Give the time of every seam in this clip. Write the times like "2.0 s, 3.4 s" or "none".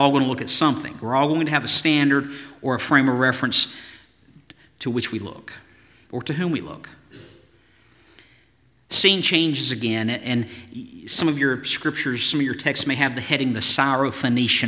none